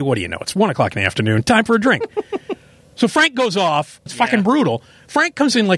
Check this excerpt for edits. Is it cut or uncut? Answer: cut